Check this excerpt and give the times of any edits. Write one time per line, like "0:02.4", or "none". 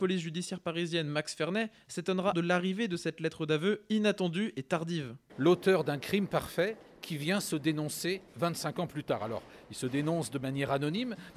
0:02.3
0:05.3